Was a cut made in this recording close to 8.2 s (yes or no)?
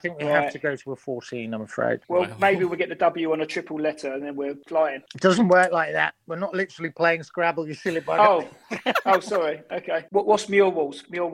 no